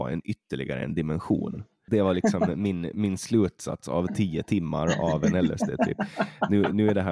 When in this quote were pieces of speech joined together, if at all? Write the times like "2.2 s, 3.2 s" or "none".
1.9 s